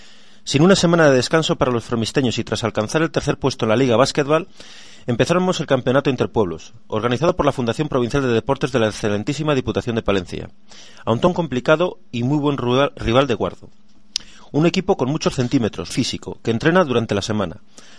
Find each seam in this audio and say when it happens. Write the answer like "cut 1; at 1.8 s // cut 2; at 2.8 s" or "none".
cut 1; at 15.9 s